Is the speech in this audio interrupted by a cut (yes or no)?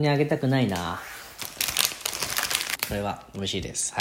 yes